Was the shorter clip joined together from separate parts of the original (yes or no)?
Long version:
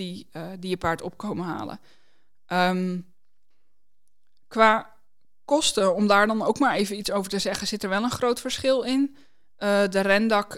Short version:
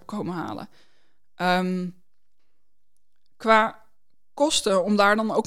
no